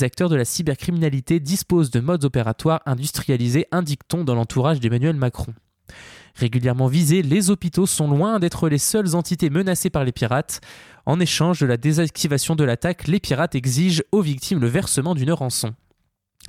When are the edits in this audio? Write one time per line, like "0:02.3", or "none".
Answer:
0:10.9

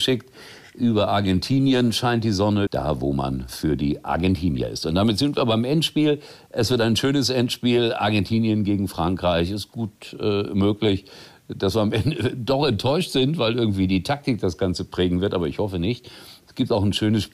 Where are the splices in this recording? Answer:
0:02.7

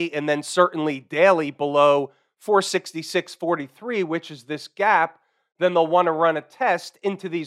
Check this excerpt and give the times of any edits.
none

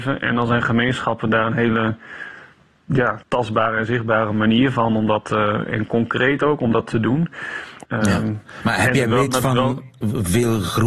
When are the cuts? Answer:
0:03.2
0:07.8

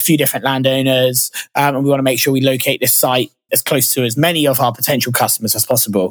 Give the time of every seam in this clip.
0:03.5

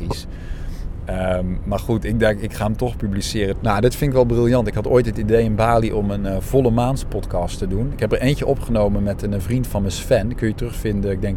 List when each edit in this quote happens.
0:03.5

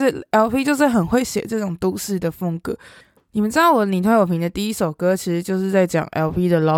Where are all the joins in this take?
none

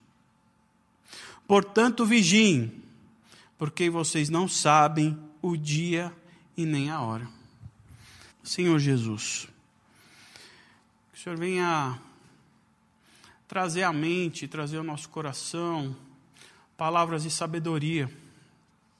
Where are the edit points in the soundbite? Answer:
0:08.3
0:11.1

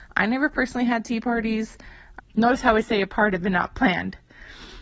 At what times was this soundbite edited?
0:02.2

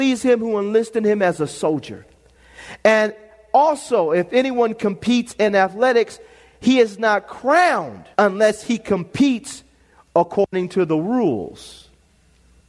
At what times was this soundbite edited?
0:08.1

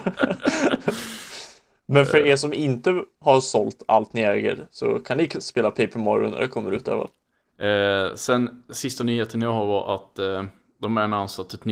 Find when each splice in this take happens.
0:07.5

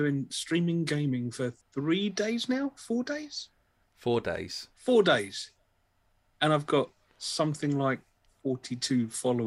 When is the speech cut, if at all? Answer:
0:01.6

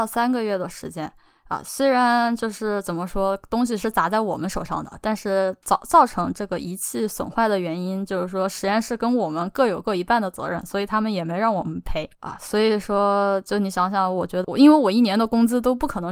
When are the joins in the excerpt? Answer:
0:12.1
0:14.4

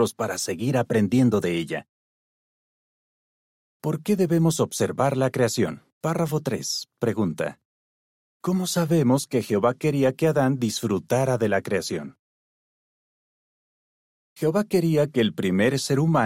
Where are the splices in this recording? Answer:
0:05.9

